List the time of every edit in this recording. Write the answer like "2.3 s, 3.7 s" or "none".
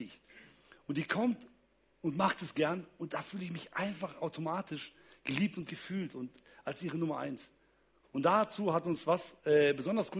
8.0 s